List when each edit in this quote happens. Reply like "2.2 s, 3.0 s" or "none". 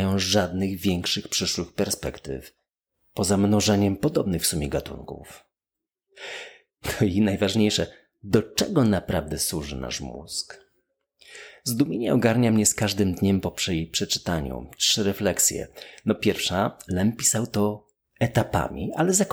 none